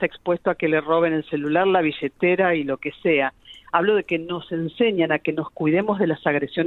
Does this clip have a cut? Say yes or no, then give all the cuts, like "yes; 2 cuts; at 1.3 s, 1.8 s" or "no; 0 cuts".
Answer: no; 0 cuts